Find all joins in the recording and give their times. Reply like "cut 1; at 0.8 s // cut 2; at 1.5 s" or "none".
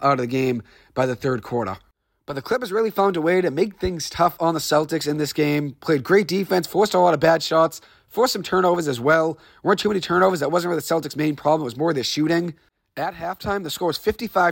none